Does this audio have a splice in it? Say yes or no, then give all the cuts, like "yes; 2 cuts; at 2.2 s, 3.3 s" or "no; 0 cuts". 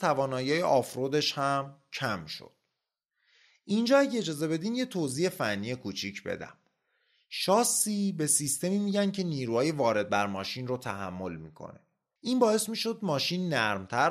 yes; 1 cut; at 12.2 s